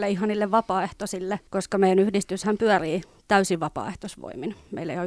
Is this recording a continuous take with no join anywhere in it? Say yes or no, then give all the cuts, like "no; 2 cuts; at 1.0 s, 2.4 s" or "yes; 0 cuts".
no; 1 cut; at 1.5 s